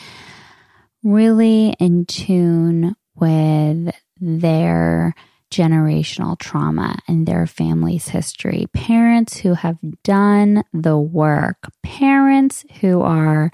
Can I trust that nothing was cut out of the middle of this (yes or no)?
yes